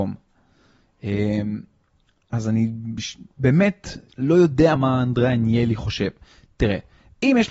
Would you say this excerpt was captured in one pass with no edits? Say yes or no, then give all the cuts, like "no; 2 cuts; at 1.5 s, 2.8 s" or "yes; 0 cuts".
no; 1 cut; at 4.8 s